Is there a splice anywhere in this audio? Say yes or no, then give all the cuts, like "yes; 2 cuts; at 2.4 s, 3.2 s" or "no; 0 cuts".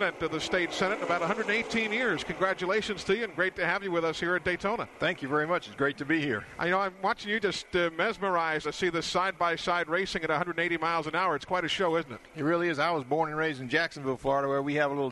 yes; 1 cut; at 8.6 s